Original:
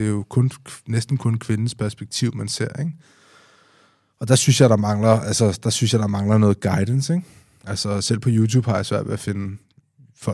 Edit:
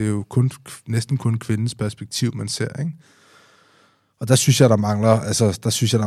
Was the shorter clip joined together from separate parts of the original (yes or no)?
no